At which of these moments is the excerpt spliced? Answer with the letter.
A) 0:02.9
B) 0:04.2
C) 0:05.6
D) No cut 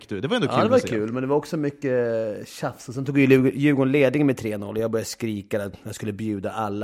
D